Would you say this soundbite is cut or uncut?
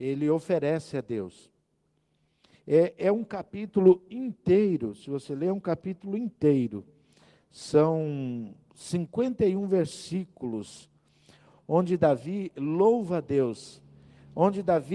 uncut